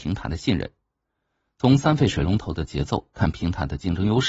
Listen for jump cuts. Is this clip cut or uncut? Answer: uncut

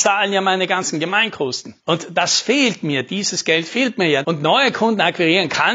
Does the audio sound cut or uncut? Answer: cut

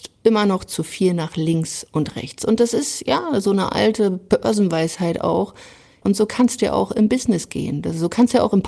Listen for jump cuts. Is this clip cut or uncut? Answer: cut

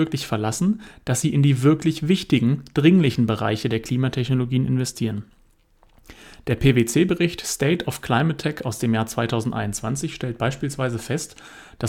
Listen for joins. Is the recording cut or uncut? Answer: uncut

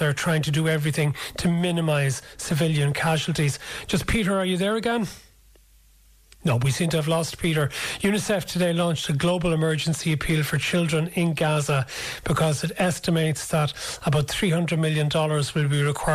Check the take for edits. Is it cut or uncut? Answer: uncut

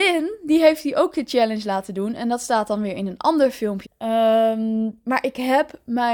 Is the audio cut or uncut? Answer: cut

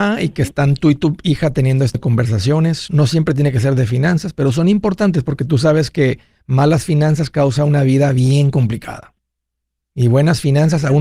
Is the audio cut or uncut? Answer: cut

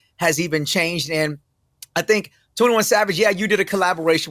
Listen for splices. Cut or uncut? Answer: uncut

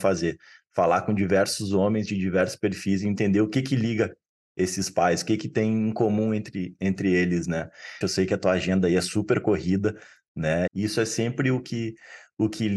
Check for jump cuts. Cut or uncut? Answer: cut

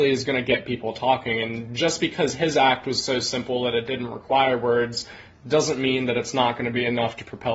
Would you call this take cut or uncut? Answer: uncut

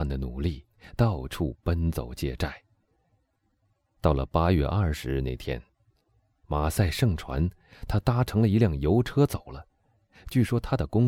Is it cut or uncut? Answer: uncut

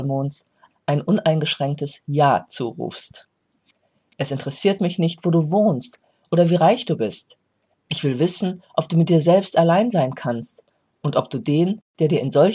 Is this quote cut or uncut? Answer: cut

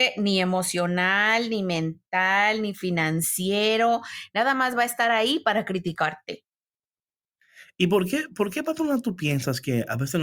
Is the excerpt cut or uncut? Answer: uncut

